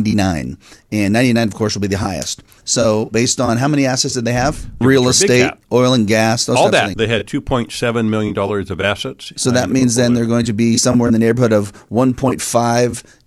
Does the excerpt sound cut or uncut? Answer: cut